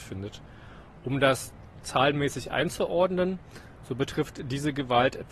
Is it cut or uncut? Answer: uncut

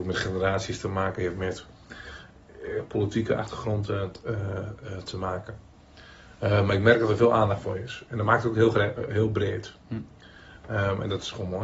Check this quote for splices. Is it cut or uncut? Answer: uncut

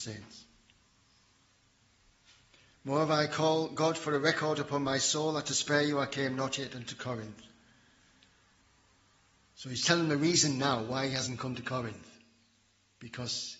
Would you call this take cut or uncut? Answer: uncut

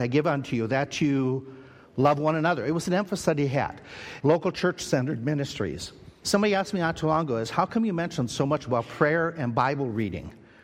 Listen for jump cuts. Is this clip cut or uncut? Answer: cut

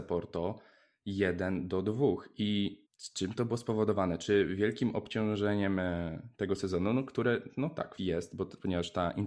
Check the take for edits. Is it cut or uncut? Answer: cut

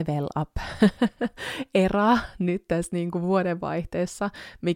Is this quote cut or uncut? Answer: uncut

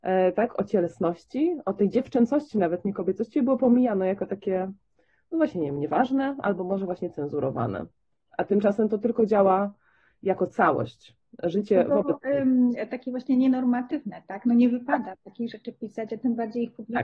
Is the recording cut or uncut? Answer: uncut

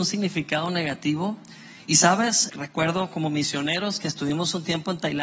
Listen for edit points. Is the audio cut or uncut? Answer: cut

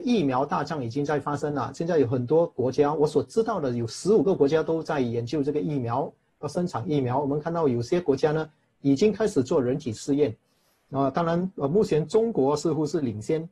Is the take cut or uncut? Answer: uncut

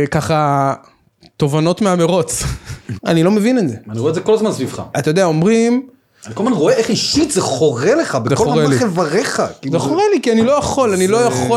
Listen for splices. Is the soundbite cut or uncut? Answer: cut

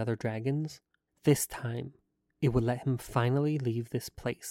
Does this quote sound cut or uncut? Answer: cut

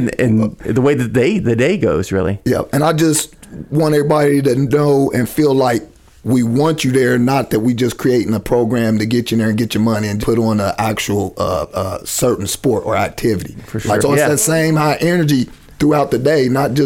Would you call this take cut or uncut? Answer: cut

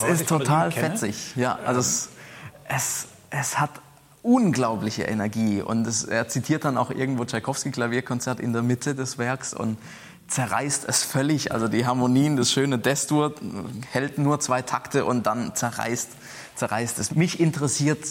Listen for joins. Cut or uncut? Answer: uncut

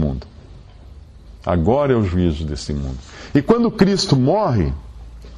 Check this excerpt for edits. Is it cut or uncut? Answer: uncut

